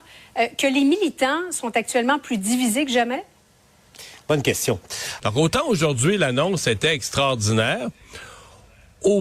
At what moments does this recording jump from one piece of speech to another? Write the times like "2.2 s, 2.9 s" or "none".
5.2 s

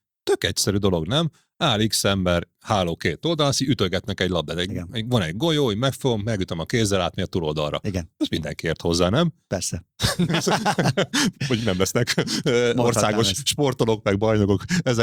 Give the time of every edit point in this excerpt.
none

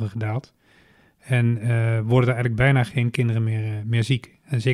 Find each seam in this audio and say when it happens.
none

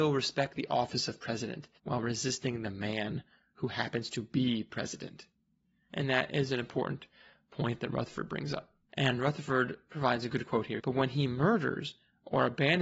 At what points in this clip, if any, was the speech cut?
1.8 s, 8.9 s, 10.8 s

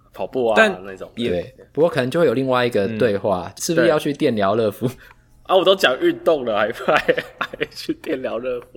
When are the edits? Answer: 3.6 s

